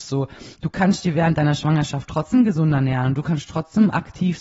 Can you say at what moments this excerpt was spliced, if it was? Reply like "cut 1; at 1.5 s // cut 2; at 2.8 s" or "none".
none